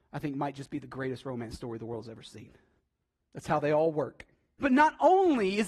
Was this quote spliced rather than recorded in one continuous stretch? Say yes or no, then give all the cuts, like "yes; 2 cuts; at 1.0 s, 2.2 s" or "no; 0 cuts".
yes; 2 cuts; at 3.2 s, 4.6 s